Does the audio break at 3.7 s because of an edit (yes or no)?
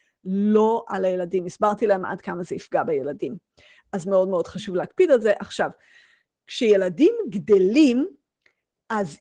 no